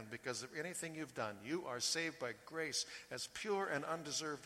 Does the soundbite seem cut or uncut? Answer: uncut